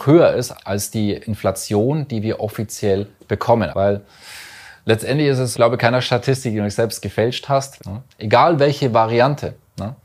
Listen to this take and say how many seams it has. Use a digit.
3